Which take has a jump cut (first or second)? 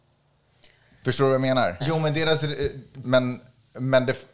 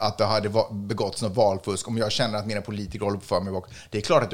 first